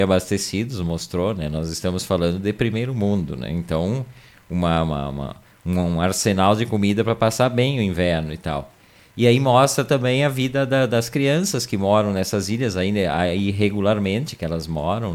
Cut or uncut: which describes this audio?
uncut